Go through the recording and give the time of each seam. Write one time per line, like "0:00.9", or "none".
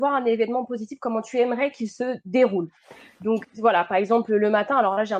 0:03.4